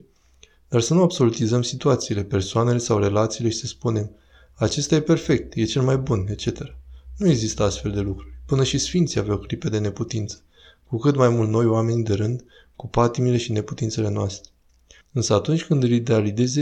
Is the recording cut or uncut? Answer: cut